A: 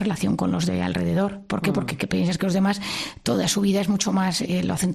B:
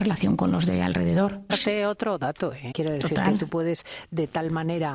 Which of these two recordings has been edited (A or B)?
B